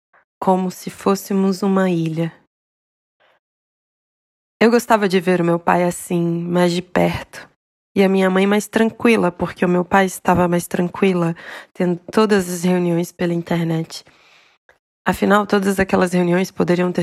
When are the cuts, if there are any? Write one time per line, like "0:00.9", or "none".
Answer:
none